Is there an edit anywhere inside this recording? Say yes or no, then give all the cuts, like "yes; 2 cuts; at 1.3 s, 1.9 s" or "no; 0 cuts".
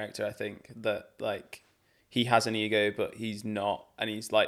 no; 0 cuts